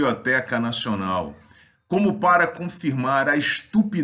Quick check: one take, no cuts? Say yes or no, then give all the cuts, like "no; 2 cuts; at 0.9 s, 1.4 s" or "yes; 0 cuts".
yes; 0 cuts